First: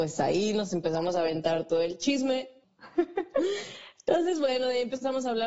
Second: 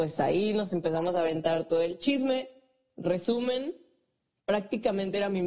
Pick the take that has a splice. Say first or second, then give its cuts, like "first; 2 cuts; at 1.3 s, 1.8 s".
first; 1 cut; at 2.6 s